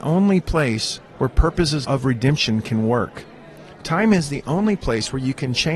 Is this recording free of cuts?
no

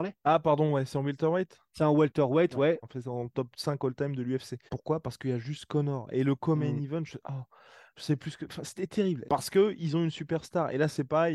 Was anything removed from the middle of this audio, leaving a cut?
yes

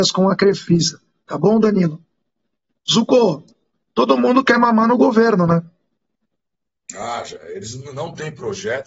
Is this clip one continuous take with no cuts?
yes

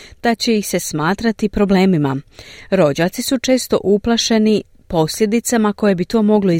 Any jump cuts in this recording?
no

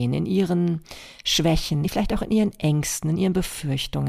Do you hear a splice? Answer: yes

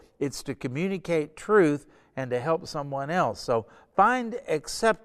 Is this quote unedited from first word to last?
yes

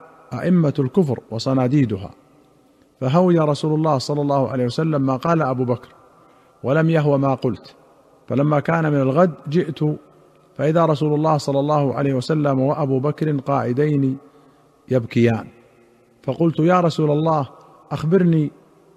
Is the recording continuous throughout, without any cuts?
yes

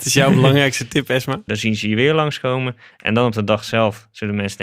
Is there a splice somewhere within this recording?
yes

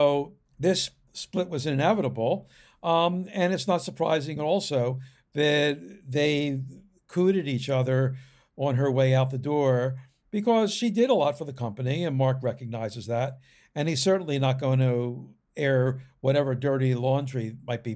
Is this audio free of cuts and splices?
yes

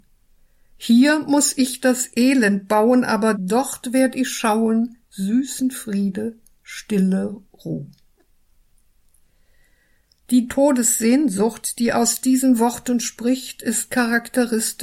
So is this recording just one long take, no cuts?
no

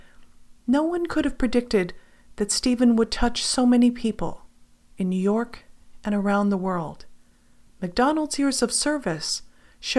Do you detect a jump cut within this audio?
yes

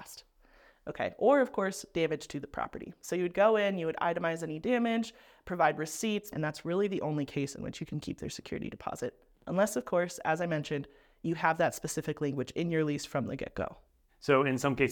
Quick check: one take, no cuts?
no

